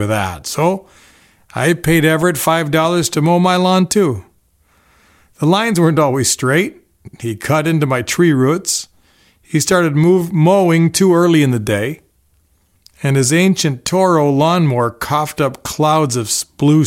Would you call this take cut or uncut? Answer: uncut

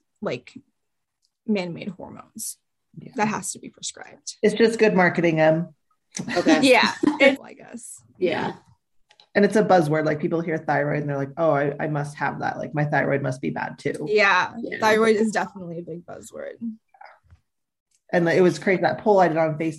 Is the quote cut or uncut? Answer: cut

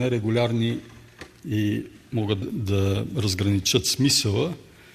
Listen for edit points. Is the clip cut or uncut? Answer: cut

